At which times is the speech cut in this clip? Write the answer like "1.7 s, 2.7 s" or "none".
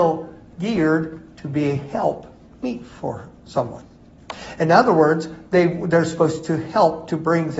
none